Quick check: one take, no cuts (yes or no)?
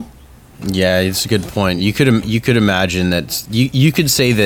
yes